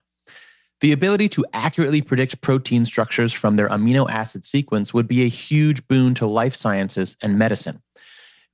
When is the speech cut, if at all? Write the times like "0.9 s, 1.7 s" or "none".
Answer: none